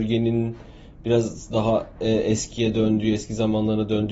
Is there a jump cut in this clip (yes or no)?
no